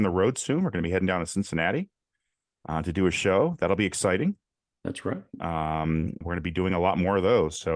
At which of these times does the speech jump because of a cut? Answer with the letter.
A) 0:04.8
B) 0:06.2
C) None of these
B